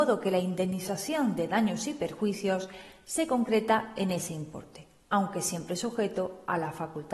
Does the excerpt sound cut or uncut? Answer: uncut